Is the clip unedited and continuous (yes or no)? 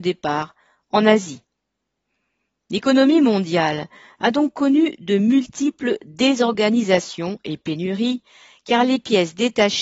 yes